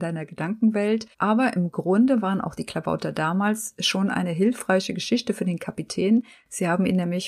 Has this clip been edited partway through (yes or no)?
yes